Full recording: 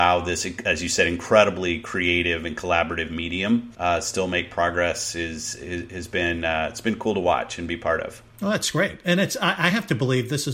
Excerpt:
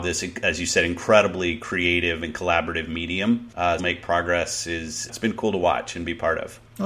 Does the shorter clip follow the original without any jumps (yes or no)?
no